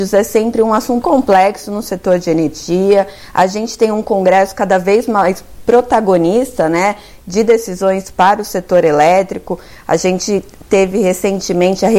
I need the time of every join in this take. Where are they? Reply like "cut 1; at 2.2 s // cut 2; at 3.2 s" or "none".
cut 1; at 1.0 s